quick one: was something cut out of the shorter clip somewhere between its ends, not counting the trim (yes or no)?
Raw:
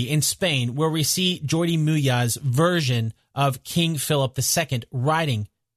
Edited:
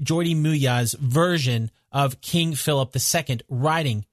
no